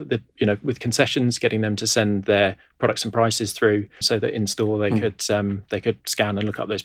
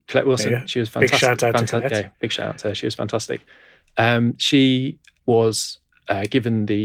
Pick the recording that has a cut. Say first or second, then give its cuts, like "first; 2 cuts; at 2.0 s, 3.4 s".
first; 1 cut; at 4.0 s